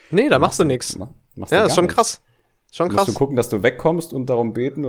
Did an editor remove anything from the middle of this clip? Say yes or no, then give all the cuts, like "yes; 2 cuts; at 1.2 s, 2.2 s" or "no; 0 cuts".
no; 0 cuts